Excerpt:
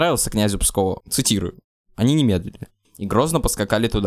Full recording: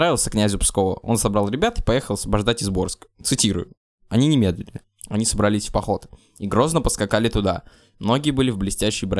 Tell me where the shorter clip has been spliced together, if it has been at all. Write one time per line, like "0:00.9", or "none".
0:01.0
0:02.8